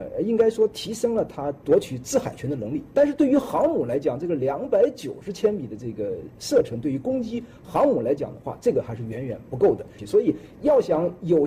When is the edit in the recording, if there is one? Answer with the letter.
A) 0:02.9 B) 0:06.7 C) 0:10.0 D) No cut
C